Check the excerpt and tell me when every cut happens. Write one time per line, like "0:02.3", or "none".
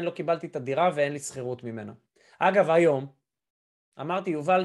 none